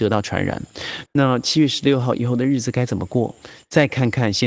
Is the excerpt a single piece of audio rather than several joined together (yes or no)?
no